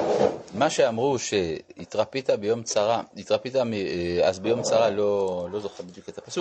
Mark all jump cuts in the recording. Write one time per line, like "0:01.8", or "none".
none